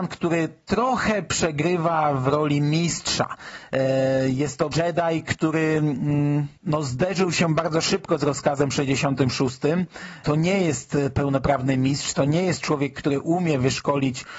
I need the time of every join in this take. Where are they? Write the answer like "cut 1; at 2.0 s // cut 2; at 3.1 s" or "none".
cut 1; at 4.7 s